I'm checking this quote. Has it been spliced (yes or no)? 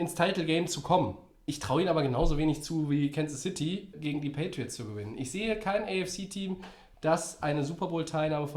yes